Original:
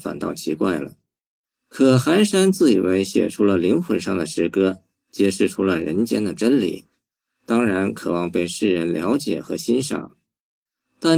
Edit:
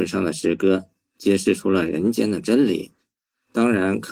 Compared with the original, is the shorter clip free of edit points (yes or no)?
yes